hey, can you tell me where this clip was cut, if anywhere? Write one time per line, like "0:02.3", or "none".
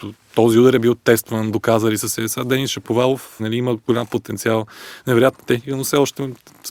0:03.4